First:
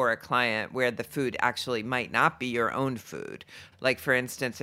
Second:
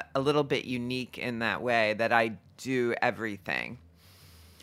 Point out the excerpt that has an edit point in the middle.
first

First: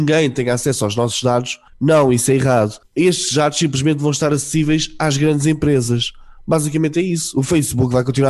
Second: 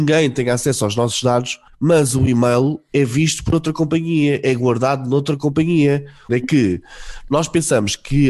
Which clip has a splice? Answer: second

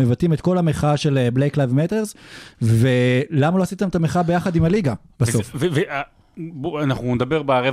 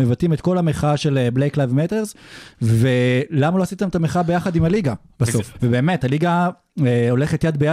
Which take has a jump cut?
second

